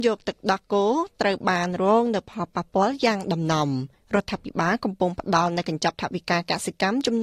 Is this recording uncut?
yes; 0 cuts

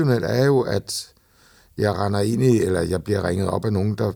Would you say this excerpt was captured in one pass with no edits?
yes; 0 cuts

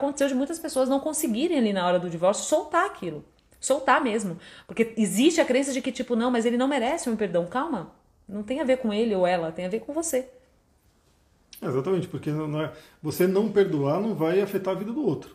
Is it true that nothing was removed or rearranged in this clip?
yes; 0 cuts

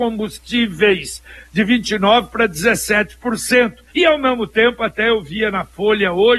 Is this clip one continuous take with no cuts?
no; 1 cut; at 3.9 s

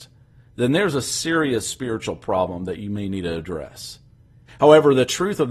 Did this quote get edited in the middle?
yes; 1 cut; at 4.5 s

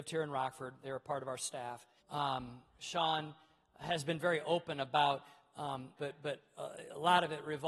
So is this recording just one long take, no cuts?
no; 2 cuts; at 2.0 s, 6.0 s

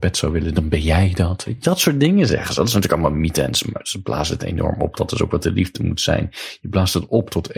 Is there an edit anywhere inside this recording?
no; 0 cuts

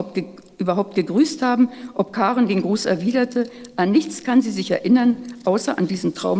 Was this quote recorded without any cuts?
yes; 0 cuts

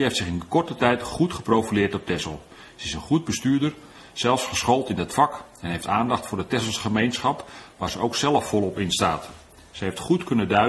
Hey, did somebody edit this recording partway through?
no; 0 cuts

